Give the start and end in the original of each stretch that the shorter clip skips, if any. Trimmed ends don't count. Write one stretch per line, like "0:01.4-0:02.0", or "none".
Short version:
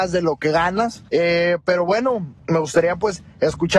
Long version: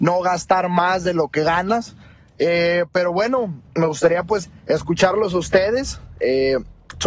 0:02.0-0:02.4